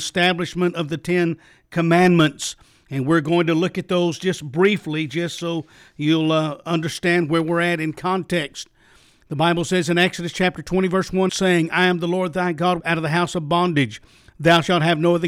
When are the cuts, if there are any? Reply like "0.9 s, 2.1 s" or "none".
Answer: 11.3 s, 12.8 s